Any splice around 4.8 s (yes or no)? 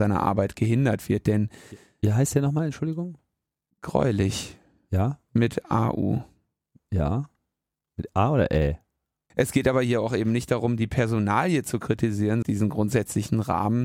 no